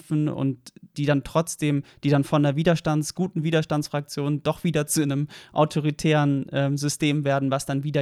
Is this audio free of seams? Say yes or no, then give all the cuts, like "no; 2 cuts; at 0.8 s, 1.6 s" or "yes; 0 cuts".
yes; 0 cuts